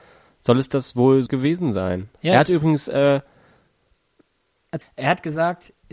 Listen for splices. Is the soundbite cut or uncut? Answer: cut